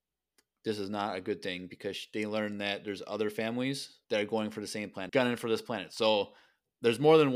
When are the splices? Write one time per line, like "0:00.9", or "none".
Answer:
0:04.0
0:05.1

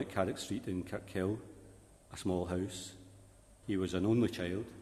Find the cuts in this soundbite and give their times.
0:03.6

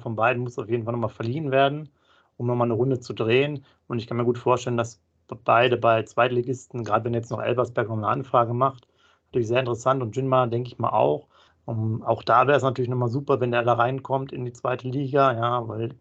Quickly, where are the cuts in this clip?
0:11.5

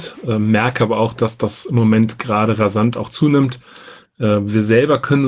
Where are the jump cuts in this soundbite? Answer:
0:04.1

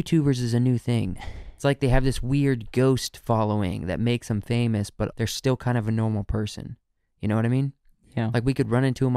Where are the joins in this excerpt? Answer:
0:05.1

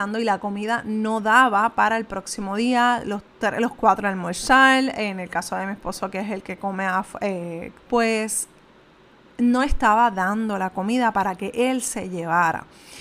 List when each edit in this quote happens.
0:07.8

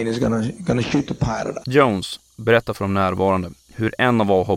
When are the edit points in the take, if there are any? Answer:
0:01.6

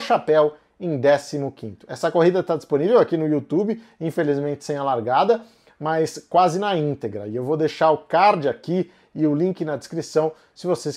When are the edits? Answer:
none

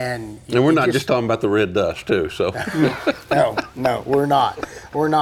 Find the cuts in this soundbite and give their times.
none

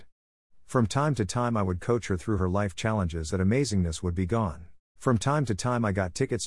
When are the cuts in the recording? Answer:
0:03.3
0:05.0

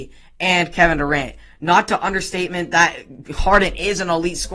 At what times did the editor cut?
none

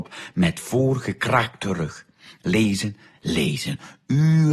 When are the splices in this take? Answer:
0:03.1

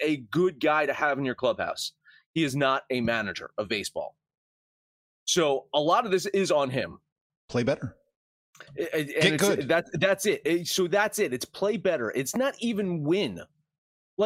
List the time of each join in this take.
0:07.4

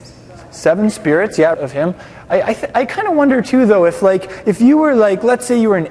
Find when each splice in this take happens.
0:01.5

